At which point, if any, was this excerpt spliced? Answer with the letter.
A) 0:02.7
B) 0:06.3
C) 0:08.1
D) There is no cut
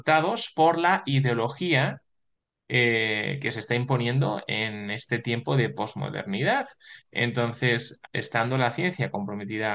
C